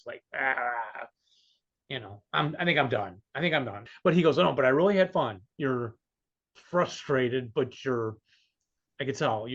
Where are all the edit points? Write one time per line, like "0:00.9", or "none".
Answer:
0:03.9
0:05.5

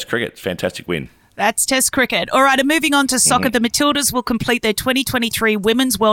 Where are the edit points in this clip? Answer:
none

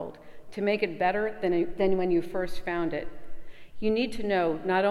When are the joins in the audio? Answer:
none

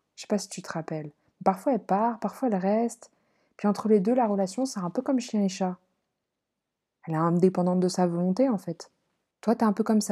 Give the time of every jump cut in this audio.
none

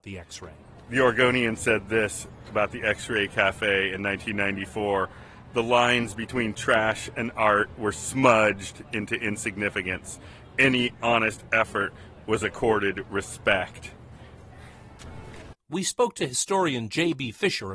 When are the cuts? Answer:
0:15.5

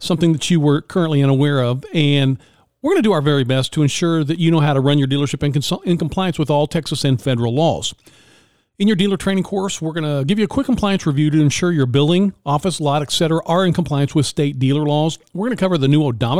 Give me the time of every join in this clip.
none

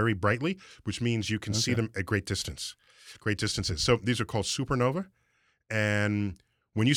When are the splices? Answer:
none

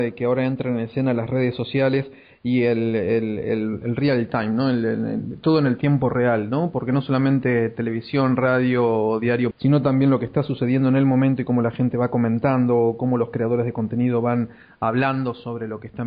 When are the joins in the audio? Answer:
0:09.5

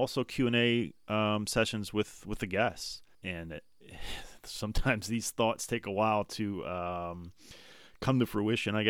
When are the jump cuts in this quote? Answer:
0:03.1

